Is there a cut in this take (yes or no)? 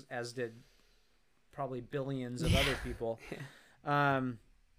no